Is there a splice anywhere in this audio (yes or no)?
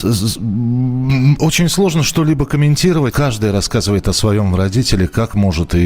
yes